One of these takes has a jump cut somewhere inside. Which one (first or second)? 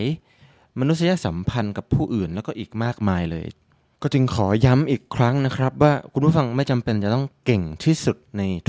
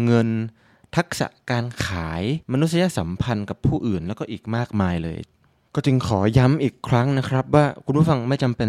second